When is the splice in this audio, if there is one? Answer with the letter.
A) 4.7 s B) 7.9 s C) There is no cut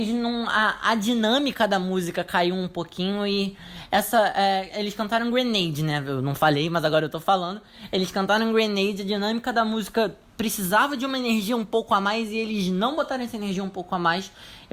C